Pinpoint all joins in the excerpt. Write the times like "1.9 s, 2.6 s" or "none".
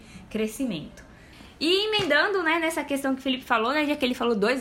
none

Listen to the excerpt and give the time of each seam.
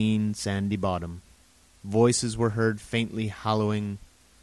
1.8 s

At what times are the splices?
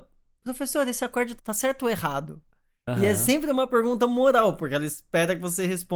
1.4 s

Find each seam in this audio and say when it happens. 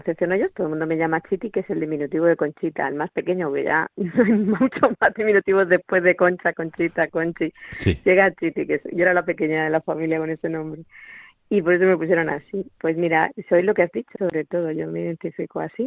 14.1 s

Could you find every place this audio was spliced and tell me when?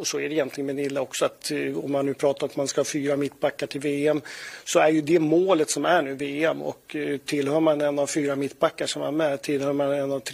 none

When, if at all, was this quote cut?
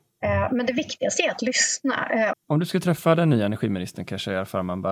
2.3 s

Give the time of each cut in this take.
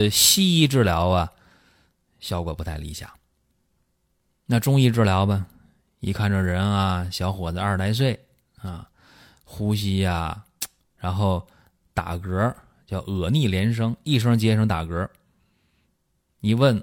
10.8 s

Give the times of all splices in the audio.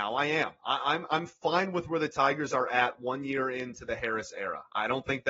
none

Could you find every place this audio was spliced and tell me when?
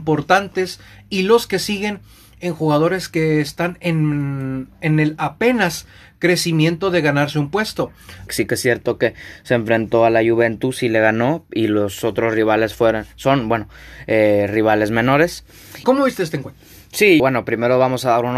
8.3 s, 15.8 s, 17.2 s

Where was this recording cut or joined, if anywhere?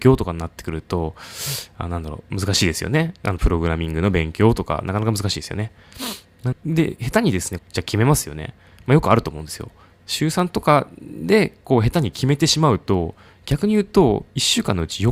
6.5 s, 7.6 s, 9.9 s

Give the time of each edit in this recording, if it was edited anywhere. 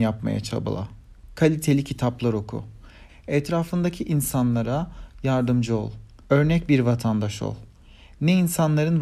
3.1 s, 6.3 s

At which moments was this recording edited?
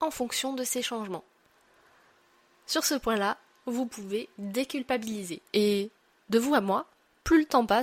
5.5 s

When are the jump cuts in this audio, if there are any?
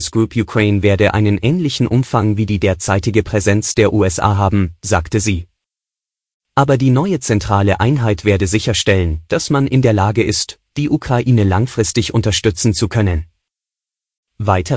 none

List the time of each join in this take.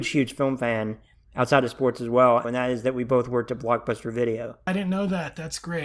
2.4 s, 4.7 s

